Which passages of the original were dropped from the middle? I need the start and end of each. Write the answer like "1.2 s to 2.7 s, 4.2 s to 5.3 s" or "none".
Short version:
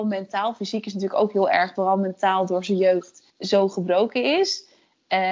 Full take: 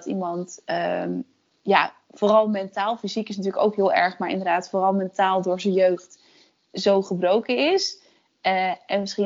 4.2 s to 4.7 s, 6.3 s to 6.6 s